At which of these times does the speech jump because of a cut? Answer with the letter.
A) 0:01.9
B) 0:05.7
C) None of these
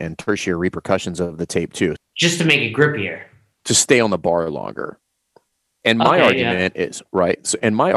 A